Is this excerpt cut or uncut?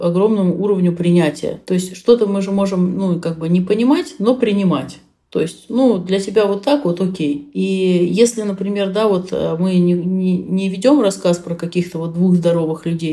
uncut